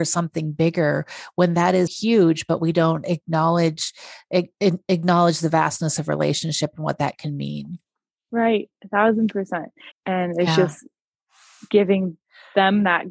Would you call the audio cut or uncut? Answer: cut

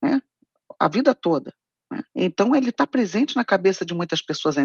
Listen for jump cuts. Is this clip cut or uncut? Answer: cut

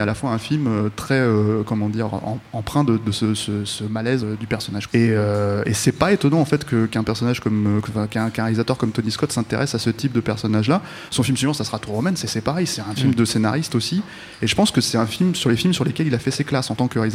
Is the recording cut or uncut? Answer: cut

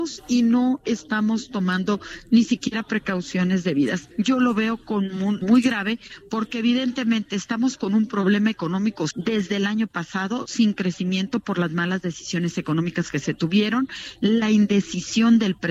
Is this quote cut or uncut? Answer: cut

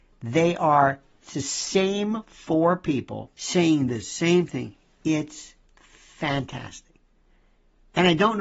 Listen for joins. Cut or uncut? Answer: cut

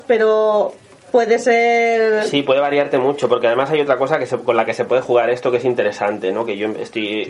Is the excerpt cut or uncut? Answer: uncut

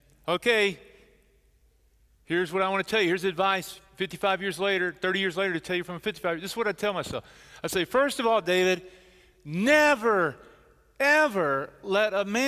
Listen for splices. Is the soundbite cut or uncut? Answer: uncut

